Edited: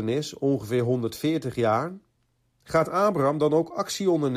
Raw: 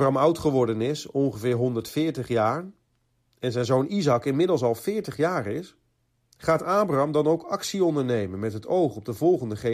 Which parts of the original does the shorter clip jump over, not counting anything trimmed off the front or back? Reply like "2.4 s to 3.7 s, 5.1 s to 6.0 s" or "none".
3.3 s to 6.3 s